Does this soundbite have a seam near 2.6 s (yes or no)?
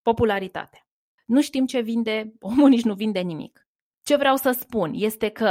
no